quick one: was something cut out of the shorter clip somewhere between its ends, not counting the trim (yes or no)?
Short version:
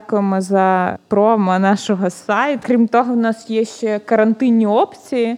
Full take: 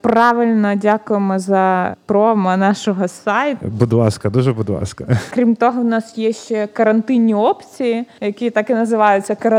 yes